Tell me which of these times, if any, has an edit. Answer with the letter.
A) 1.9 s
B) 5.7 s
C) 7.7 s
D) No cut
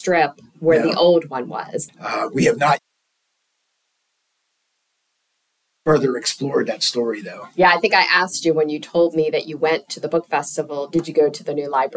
A